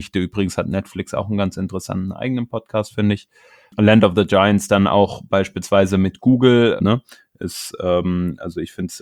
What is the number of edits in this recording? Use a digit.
1